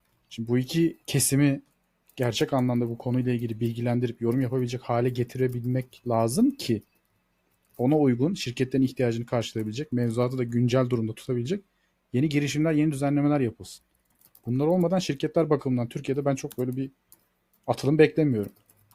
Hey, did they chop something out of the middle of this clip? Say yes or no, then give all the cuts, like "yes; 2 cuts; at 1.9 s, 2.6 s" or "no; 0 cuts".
no; 0 cuts